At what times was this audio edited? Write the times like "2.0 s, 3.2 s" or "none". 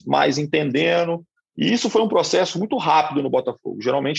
none

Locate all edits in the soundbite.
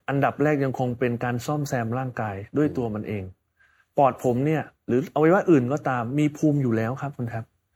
none

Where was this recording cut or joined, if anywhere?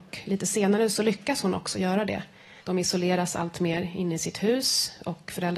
2.6 s

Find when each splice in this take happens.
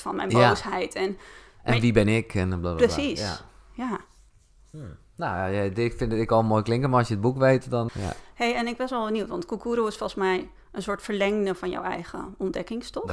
7.9 s

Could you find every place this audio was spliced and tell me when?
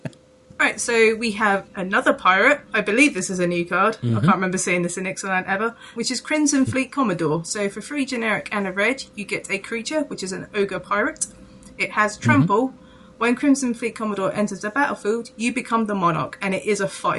none

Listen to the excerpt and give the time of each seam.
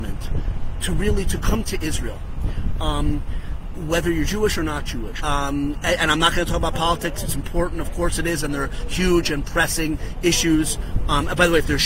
5.2 s

